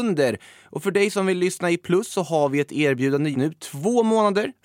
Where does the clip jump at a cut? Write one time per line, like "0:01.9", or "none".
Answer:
0:03.3